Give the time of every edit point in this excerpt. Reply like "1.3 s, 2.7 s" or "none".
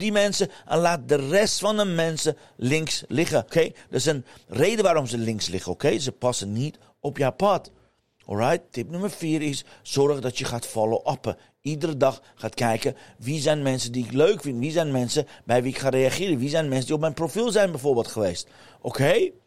3.5 s